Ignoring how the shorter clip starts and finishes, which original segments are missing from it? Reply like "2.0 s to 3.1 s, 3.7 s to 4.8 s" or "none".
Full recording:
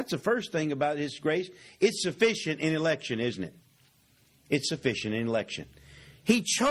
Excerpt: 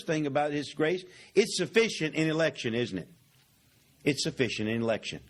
none